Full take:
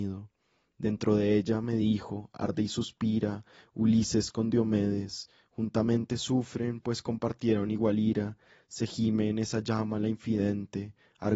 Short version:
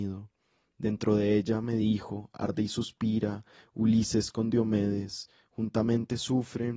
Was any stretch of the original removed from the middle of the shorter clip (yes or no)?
no